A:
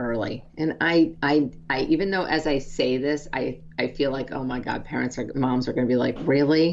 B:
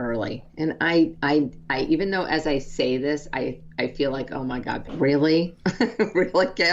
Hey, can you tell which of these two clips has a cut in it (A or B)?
B